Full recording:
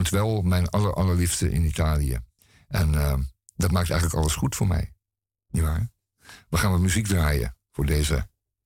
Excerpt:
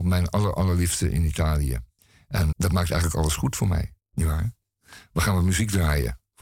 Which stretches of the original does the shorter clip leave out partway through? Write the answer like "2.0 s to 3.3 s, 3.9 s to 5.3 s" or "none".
2.9 s to 3.5 s, 5.0 s to 5.4 s